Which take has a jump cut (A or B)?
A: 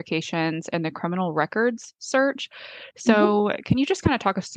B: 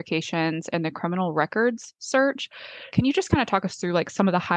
B